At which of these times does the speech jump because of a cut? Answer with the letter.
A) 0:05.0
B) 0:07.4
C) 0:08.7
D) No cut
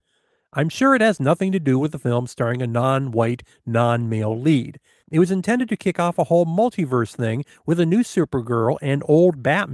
A